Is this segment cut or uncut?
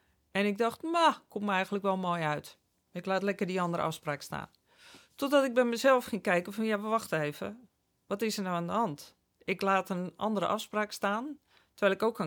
uncut